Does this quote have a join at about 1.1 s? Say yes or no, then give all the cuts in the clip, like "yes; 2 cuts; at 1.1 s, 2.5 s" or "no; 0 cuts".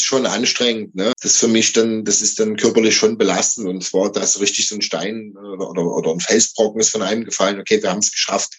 yes; 1 cut; at 1.1 s